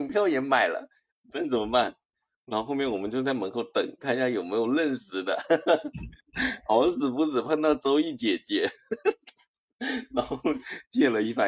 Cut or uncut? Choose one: uncut